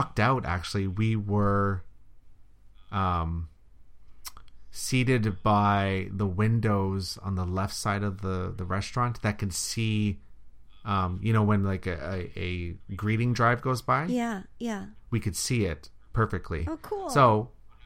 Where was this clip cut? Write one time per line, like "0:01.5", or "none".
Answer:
none